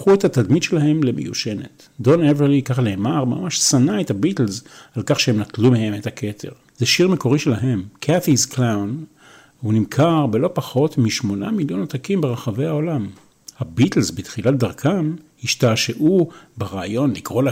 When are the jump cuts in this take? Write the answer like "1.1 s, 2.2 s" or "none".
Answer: 6.7 s, 13.5 s